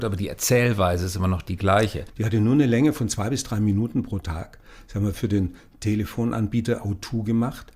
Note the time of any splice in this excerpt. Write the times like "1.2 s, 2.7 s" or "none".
2.1 s